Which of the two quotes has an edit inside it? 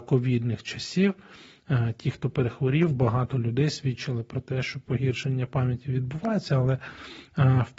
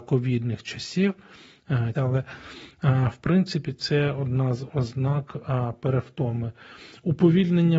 second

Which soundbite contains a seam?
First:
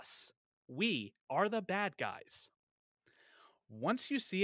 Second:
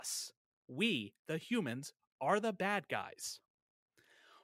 first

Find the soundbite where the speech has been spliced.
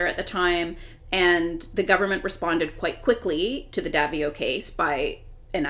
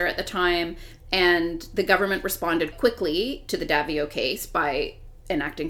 second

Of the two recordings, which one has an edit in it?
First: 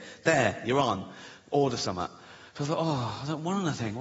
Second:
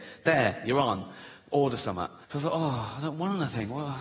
second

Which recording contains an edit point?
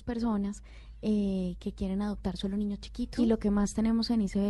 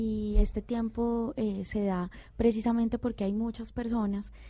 first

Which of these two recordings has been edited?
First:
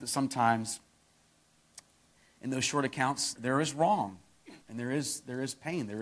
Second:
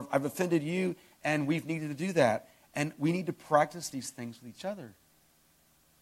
first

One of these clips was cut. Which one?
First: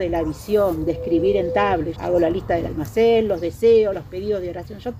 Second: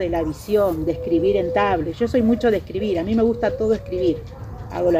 first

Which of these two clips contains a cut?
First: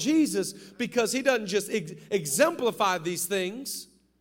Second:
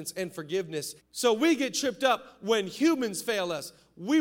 second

